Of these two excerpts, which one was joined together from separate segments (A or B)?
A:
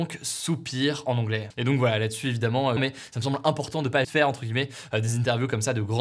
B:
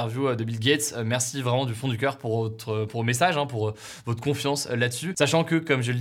A